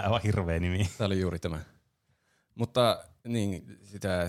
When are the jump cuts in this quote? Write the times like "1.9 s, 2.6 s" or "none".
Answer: none